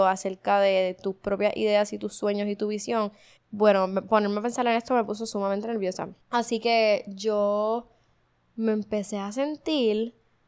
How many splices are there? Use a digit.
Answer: 2